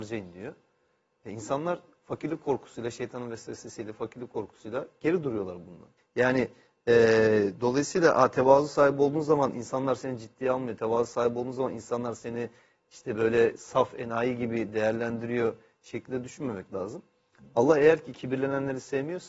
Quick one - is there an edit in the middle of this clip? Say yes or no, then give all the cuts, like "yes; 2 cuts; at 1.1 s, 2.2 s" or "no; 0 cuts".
yes; 1 cut; at 6.0 s